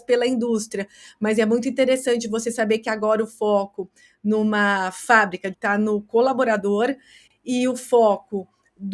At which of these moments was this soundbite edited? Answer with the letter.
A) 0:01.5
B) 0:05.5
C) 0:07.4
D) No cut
B